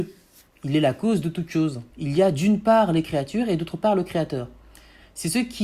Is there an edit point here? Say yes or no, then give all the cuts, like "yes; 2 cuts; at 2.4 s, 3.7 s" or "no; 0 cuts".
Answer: yes; 1 cut; at 1.9 s